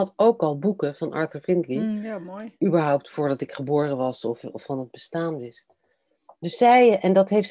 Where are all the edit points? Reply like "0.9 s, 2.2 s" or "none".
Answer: none